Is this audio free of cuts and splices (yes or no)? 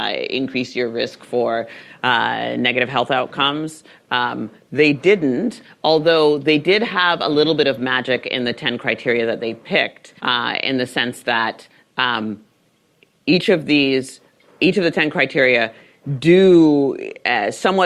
no